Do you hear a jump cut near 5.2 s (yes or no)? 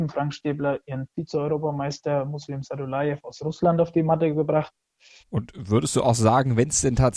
yes